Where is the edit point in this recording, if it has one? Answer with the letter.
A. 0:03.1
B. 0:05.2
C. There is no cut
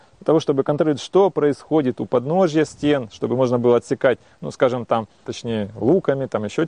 B